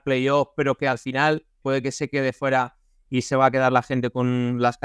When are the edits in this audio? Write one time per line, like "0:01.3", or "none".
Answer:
0:01.6